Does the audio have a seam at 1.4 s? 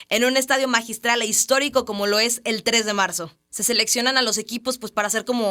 no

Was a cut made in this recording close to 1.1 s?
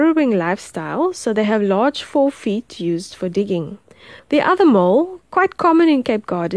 no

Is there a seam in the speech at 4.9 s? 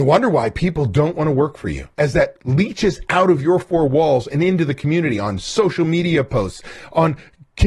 no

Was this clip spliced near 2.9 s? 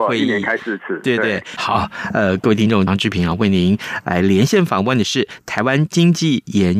yes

